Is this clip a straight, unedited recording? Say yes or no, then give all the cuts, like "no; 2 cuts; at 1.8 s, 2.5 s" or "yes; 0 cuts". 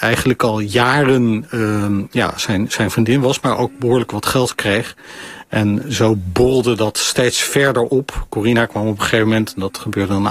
yes; 0 cuts